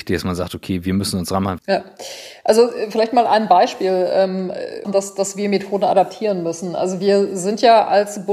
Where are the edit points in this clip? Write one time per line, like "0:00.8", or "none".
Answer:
0:01.6
0:04.8

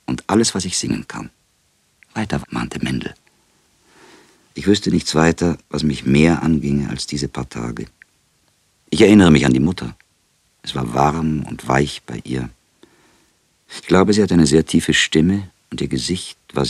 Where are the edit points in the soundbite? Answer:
0:02.4

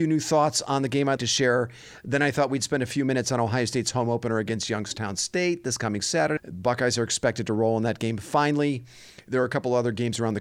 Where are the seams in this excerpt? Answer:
0:01.2
0:06.4

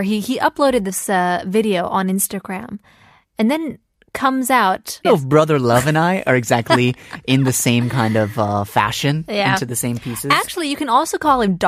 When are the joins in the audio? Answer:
0:05.0

